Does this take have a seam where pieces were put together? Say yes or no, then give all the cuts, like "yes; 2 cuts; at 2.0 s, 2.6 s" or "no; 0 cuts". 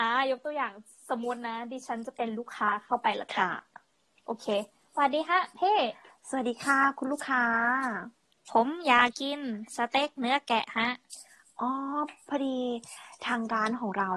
yes; 1 cut; at 9.1 s